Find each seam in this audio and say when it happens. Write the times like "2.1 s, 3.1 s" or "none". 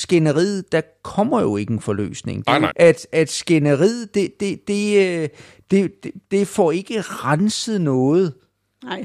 2.7 s